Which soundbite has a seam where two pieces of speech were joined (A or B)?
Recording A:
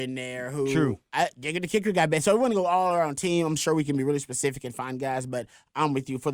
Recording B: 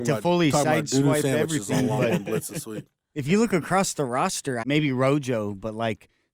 B